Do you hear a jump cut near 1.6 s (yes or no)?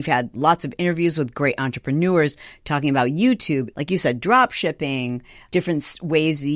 no